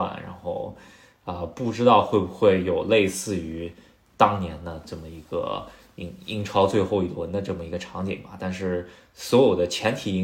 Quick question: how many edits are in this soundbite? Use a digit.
0